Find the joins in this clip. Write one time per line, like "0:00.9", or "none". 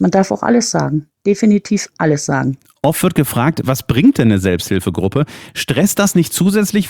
none